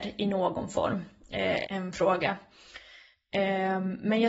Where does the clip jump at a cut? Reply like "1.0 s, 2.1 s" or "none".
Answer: 1.6 s